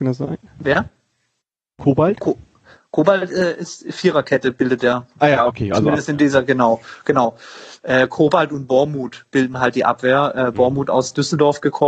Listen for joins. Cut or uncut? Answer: uncut